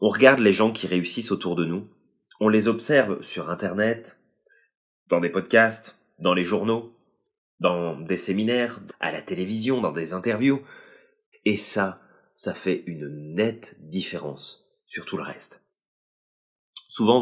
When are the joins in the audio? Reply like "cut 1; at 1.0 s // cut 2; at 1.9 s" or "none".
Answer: cut 1; at 8.9 s // cut 2; at 11.3 s